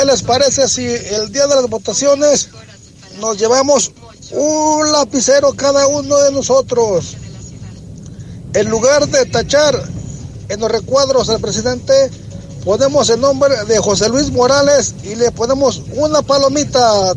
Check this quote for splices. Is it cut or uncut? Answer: uncut